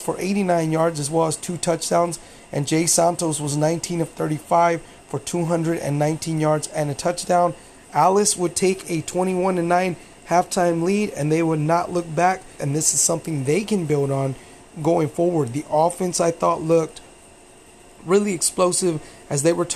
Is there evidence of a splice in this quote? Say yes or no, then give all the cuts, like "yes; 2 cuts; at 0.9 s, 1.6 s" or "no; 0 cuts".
yes; 1 cut; at 12.6 s